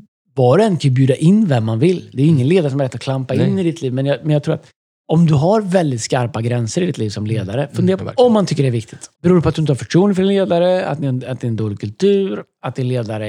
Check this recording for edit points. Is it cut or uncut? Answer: cut